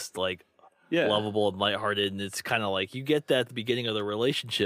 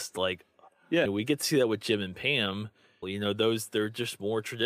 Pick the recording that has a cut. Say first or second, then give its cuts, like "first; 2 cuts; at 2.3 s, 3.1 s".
second; 2 cuts; at 1.0 s, 3.0 s